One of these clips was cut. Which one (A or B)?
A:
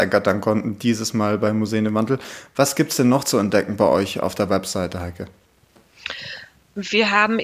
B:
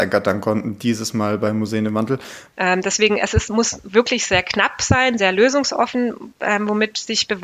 B